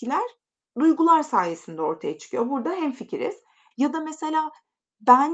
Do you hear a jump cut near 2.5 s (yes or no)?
no